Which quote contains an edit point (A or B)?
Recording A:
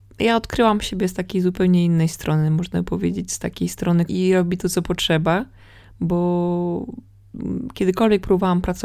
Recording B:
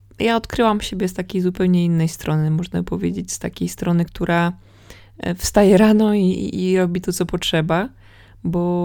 A